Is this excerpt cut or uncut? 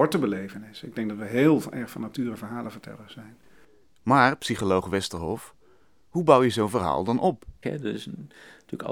cut